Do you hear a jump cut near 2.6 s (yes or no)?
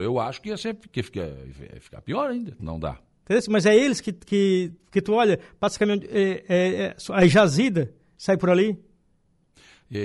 yes